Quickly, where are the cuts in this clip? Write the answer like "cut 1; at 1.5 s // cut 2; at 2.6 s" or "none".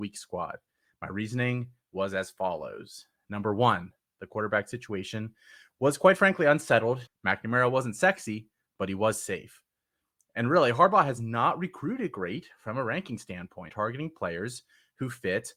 cut 1; at 7.1 s // cut 2; at 13.7 s